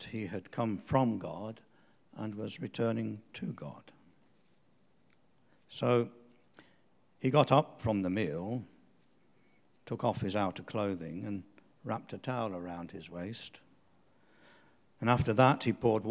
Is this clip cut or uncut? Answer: uncut